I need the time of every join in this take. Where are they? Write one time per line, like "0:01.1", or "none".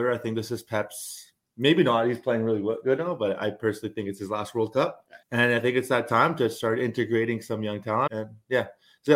0:05.2
0:08.1